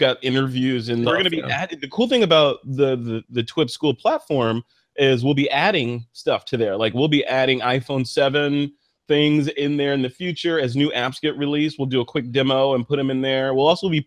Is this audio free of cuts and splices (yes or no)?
no